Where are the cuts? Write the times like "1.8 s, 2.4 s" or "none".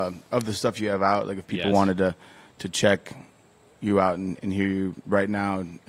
none